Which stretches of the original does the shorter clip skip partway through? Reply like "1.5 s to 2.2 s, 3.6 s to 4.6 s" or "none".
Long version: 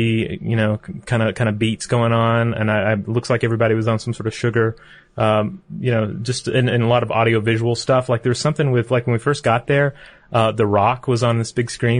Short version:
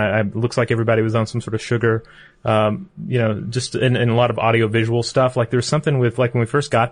none